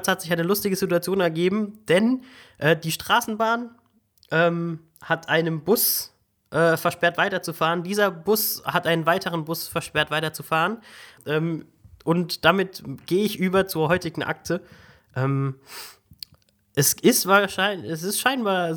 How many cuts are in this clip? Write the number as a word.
one